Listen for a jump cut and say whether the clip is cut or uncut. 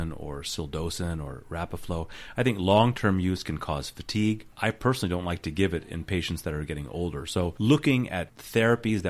uncut